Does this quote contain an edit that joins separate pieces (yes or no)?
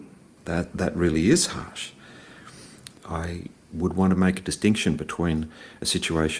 yes